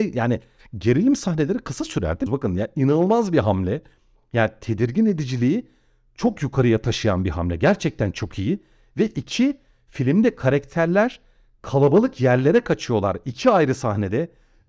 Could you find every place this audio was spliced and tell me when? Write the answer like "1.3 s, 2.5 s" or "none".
2.3 s